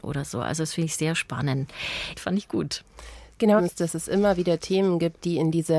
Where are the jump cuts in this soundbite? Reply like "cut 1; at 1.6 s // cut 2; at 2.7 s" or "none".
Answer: cut 1; at 2.1 s // cut 2; at 3.6 s